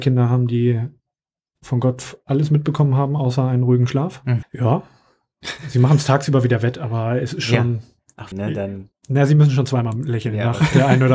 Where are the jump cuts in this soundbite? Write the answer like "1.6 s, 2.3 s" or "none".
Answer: 4.4 s, 8.3 s